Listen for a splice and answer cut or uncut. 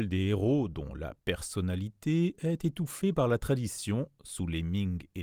uncut